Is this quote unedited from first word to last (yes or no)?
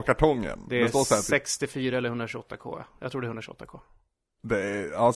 yes